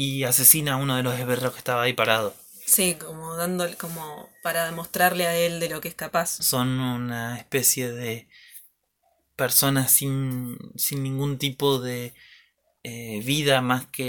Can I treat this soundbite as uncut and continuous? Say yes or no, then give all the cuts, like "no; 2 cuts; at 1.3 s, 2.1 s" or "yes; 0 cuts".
no; 1 cut; at 6.4 s